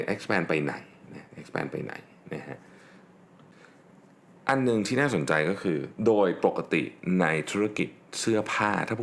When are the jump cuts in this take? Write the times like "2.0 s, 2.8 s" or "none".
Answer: none